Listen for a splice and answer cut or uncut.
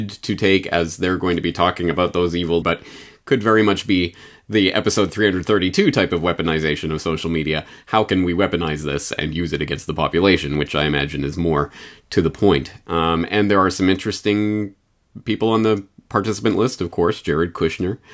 cut